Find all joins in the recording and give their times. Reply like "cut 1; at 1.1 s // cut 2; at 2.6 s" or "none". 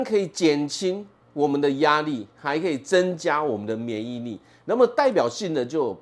none